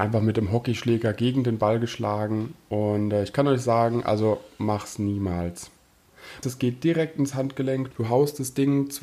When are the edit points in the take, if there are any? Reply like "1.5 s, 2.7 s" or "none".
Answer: 6.4 s, 7.9 s